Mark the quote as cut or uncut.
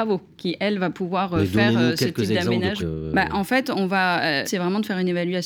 cut